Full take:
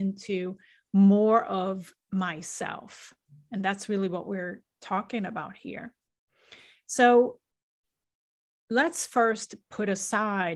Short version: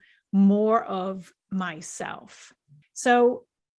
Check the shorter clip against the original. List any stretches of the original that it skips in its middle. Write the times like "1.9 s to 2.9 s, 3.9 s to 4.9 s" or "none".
3.4 s to 6.8 s